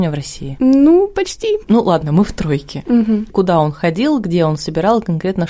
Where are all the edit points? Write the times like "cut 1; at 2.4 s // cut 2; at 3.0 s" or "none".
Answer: cut 1; at 1.6 s // cut 2; at 3.3 s